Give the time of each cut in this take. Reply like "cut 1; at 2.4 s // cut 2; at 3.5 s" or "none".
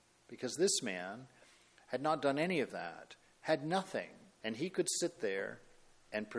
cut 1; at 4.4 s